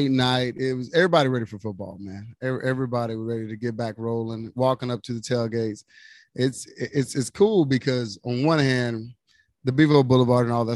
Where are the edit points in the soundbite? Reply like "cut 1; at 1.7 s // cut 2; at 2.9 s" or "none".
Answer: none